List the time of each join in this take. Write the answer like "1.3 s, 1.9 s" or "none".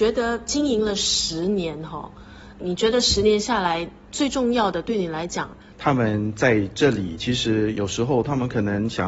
5.7 s